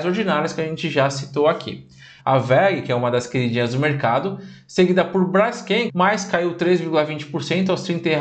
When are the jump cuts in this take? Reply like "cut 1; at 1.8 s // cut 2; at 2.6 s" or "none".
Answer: cut 1; at 2.2 s // cut 2; at 5.9 s